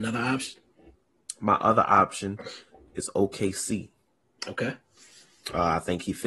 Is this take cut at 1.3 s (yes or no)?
no